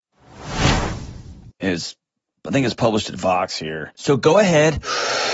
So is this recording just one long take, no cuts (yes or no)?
no